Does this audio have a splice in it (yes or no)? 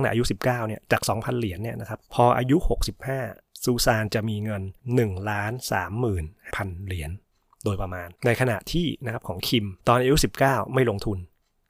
yes